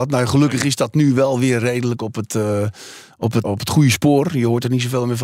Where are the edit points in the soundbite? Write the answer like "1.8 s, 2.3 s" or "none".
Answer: 3.4 s